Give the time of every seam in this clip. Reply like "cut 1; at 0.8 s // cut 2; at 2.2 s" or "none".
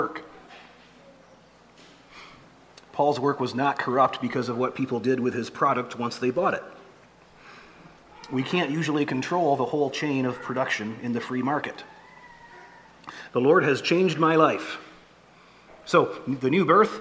cut 1; at 13.3 s // cut 2; at 15.7 s